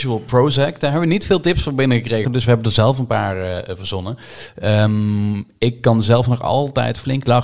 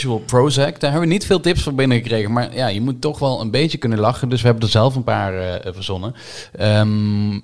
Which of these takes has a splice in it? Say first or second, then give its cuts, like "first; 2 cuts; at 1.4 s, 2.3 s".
first; 1 cut; at 2.2 s